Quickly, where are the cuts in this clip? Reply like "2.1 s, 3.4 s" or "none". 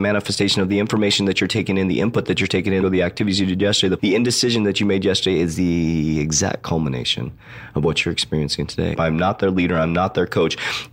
2.8 s, 4.0 s, 8.9 s